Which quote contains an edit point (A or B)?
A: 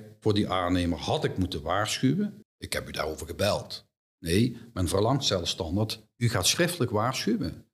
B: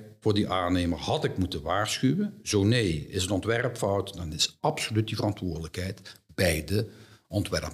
A